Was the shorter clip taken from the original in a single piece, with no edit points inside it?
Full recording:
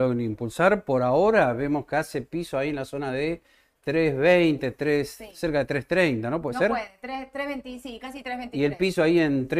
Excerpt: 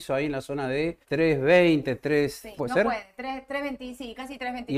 no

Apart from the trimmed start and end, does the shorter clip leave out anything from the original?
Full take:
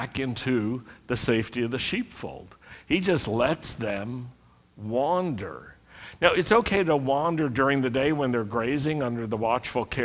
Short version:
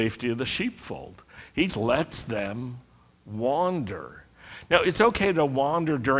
yes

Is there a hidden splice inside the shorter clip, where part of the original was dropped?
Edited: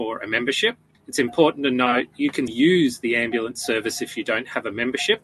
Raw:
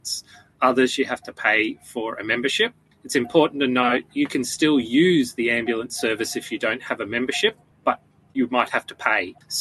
yes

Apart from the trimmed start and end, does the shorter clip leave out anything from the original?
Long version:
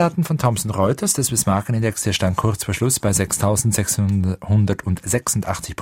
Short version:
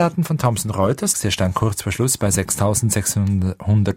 yes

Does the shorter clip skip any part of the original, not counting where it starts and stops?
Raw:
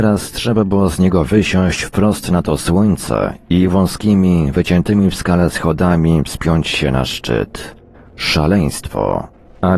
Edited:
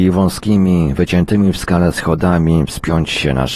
no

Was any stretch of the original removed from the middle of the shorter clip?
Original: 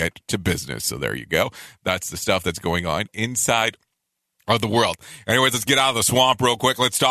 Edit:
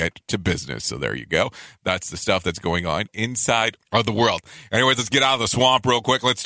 yes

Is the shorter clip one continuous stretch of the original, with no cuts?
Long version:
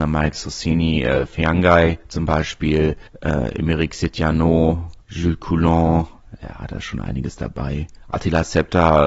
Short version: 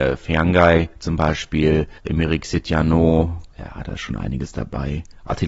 no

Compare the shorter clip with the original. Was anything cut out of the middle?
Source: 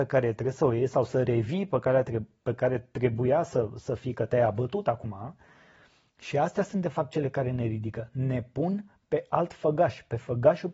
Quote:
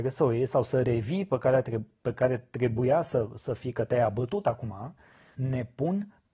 yes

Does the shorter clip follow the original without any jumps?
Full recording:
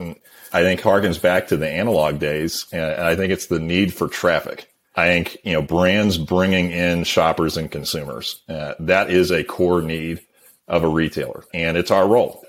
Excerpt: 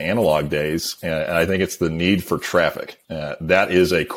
no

